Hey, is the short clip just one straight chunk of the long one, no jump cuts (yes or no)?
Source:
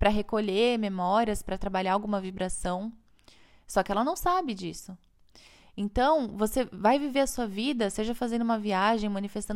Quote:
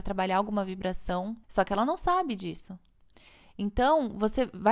no